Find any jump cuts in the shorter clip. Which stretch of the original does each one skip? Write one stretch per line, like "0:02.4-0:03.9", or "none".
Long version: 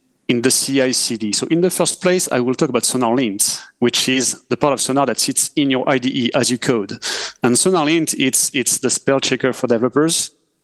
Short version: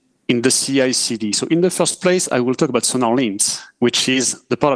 none